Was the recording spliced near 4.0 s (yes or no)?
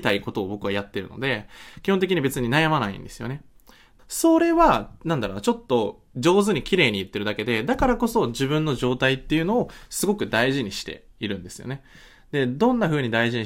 yes